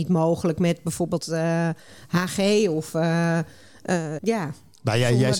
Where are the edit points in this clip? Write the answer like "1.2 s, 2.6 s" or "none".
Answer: 4.2 s